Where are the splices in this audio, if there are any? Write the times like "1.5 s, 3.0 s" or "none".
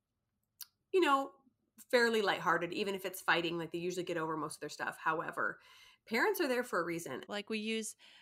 7.3 s